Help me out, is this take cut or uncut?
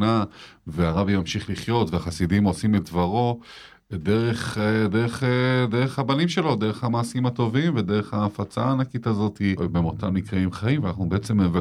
cut